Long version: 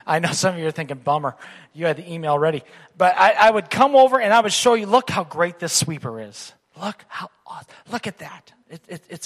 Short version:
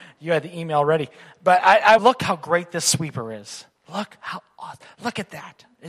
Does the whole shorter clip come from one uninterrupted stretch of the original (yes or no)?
no